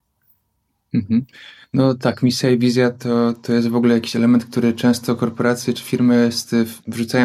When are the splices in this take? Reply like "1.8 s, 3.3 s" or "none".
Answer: none